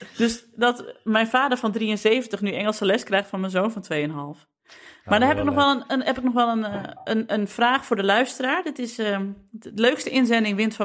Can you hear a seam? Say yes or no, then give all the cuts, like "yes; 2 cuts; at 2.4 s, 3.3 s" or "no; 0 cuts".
no; 0 cuts